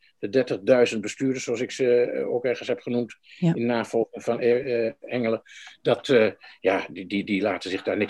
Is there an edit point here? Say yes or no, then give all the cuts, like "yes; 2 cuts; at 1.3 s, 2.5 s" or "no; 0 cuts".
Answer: no; 0 cuts